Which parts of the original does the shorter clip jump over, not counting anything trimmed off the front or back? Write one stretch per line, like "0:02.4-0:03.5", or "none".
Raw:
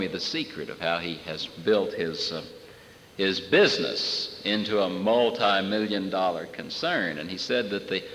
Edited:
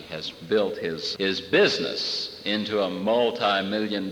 0:02.3-0:03.1